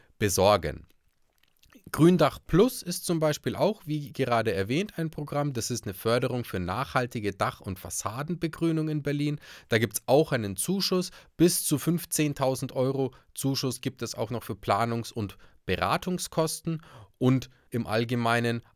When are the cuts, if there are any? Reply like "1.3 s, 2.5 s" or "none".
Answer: 17.7 s

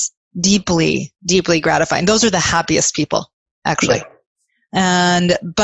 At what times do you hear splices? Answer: none

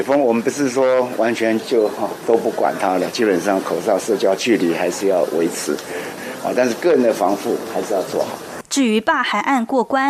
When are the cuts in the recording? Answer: 1.6 s, 6.2 s

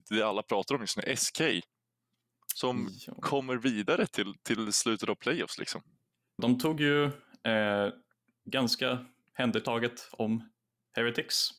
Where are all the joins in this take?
6.4 s

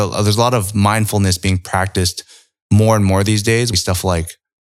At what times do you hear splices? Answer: 3.7 s

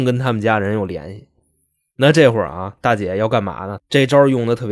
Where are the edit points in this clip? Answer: 3.8 s

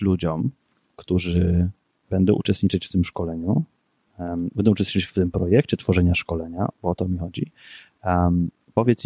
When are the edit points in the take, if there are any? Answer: none

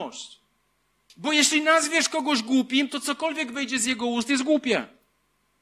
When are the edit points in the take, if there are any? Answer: 1.1 s

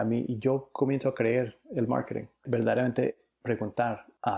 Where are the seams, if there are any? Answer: none

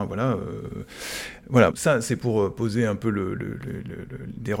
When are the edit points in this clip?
1.7 s

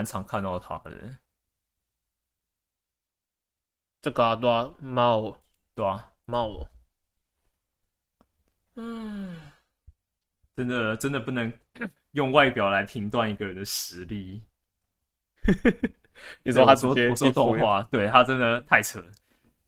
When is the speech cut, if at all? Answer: none

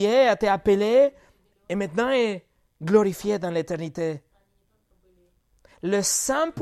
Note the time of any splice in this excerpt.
none

